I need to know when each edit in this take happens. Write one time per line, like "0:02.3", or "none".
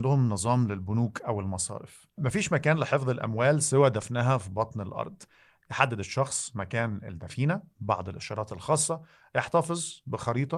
none